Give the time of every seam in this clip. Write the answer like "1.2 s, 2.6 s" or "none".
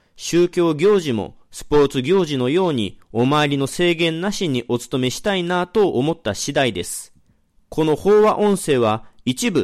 none